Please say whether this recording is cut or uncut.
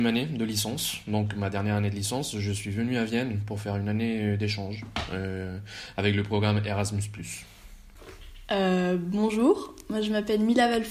uncut